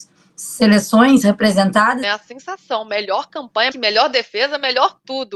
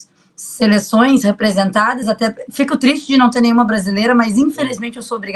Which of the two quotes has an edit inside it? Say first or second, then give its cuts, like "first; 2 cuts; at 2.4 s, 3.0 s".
first; 2 cuts; at 2.0 s, 3.7 s